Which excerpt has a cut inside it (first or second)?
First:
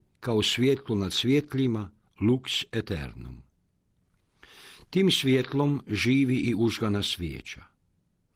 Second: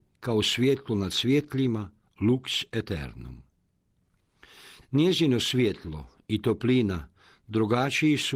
second